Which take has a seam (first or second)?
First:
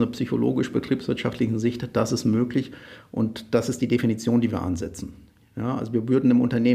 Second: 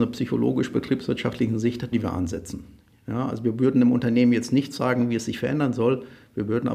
second